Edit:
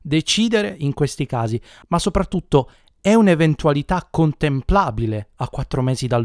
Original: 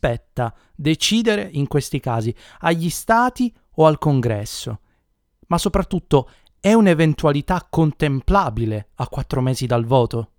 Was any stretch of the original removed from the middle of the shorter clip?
yes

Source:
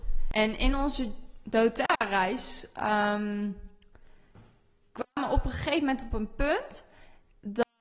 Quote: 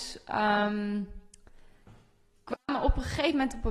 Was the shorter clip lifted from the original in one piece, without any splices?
yes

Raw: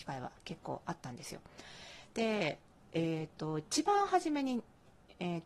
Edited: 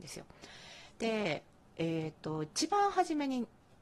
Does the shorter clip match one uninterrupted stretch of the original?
yes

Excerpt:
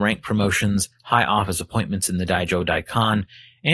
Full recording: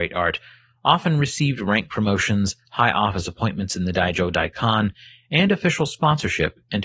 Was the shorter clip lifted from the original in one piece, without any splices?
yes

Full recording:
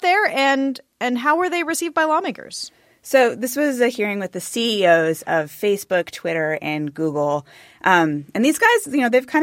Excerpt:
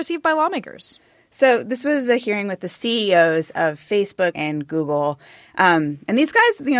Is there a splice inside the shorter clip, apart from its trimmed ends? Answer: yes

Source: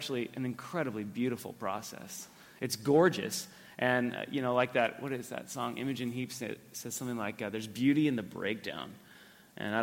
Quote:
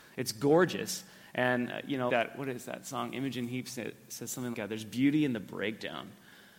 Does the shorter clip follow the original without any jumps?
no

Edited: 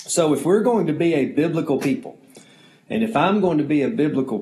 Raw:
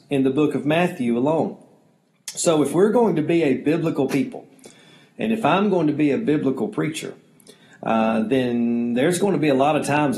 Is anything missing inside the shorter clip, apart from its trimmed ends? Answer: no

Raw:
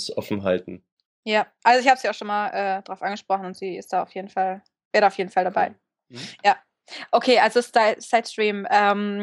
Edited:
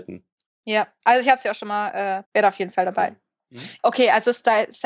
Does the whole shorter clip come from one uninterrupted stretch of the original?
no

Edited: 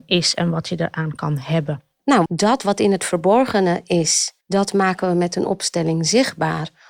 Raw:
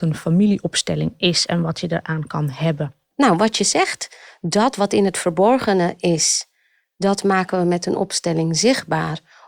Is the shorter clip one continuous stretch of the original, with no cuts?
no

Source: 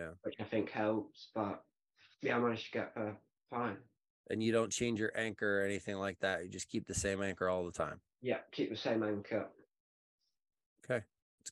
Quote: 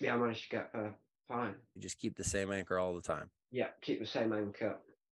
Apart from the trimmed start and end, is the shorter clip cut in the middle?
yes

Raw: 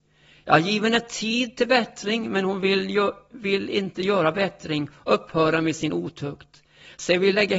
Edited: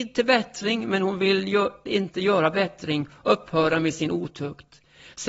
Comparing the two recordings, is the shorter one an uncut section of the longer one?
no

